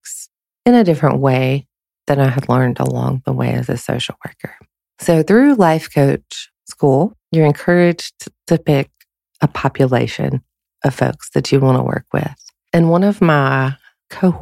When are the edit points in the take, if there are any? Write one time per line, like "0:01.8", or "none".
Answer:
none